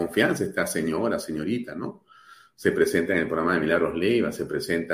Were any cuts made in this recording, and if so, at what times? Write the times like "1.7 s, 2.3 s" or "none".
none